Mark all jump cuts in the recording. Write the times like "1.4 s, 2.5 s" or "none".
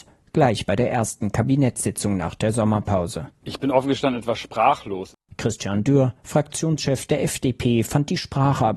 none